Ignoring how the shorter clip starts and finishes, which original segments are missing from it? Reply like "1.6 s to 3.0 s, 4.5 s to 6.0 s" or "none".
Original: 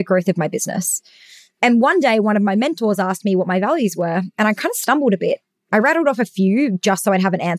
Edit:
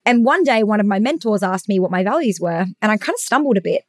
none